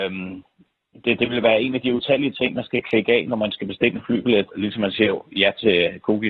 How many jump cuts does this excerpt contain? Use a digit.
1